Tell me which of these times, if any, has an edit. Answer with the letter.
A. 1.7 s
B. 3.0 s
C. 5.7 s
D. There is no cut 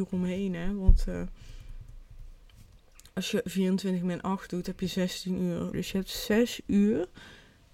C